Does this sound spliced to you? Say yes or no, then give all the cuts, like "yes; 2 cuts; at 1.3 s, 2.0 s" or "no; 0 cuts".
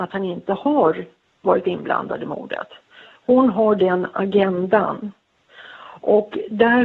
no; 0 cuts